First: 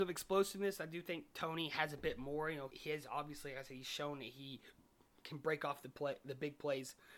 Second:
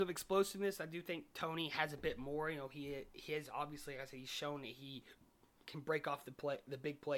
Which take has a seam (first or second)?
first